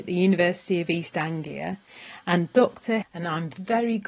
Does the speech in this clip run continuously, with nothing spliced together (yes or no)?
no